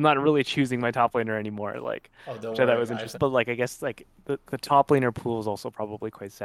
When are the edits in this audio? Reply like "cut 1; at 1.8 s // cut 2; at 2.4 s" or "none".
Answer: cut 1; at 3.1 s // cut 2; at 4.5 s